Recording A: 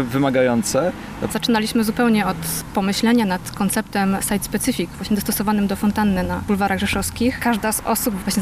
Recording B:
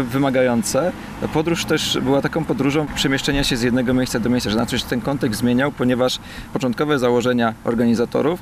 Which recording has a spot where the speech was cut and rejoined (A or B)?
A